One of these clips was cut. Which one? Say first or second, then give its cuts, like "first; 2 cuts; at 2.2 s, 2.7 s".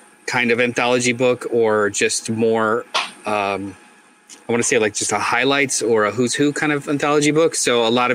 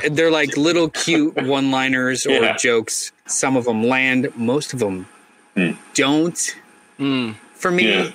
second; 1 cut; at 3.3 s